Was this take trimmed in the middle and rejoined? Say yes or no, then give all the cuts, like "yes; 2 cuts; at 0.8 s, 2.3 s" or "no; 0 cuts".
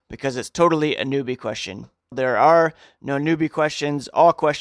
yes; 1 cut; at 2.1 s